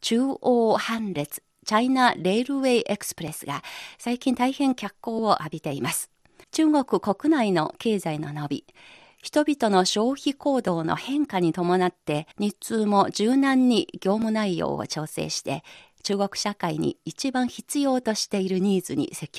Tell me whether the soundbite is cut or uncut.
cut